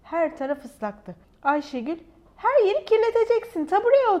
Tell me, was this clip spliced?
yes; 1 cut; at 1.2 s

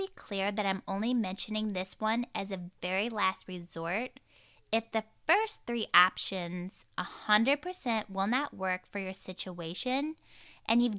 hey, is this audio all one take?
yes; 0 cuts

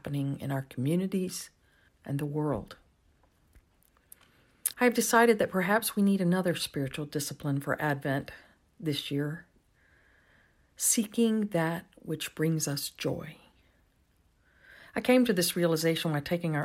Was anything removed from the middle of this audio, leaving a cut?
yes; 2 cuts; at 1.9 s, 4.7 s

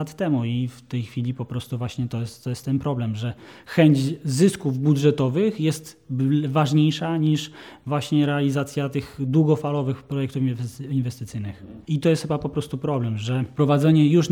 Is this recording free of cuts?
no; 1 cut; at 11.8 s

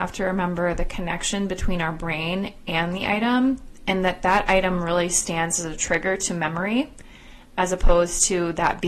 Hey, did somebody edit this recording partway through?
no; 0 cuts

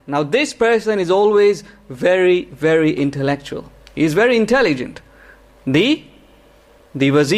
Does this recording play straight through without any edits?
yes; 0 cuts

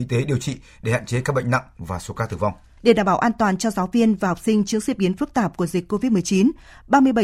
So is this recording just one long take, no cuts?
no; 1 cut; at 2.8 s

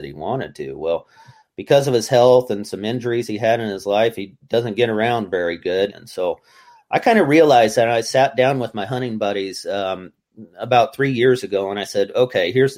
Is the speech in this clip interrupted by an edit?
yes; 1 cut; at 5.9 s

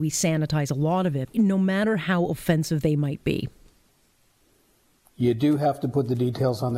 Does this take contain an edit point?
yes; 1 cut; at 1.3 s

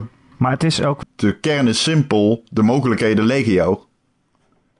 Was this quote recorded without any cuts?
no; 1 cut; at 1.0 s

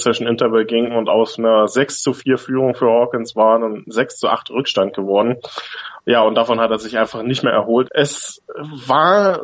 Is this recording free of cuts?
no; 1 cut; at 7.8 s

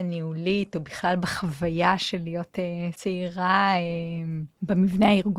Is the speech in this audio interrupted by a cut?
yes; 1 cut; at 2.9 s

